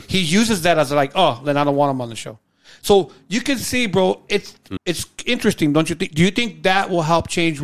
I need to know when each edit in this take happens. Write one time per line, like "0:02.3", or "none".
0:04.8